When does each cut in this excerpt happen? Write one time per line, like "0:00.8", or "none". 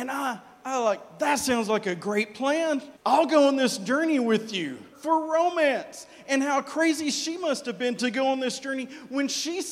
0:03.0
0:04.9